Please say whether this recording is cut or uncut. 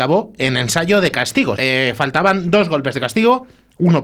cut